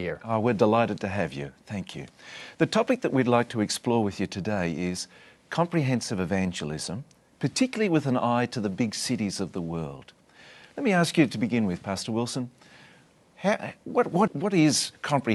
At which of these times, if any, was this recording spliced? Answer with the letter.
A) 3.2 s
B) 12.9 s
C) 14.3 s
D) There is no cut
C